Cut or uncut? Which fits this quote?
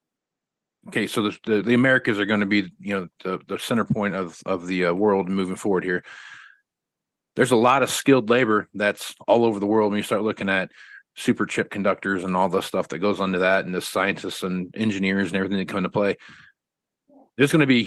uncut